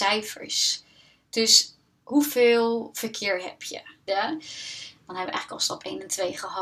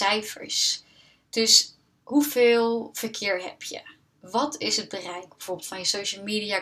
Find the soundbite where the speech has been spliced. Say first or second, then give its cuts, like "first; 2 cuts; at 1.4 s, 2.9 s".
first; 1 cut; at 4.1 s